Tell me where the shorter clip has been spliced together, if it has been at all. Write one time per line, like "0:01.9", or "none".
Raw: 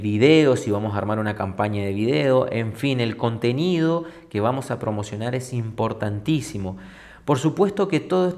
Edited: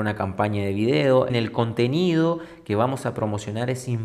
0:01.3